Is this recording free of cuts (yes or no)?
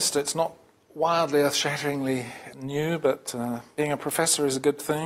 no